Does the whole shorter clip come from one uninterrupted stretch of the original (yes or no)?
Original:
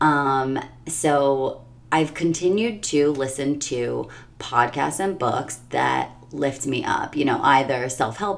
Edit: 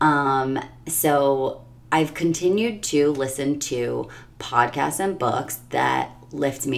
yes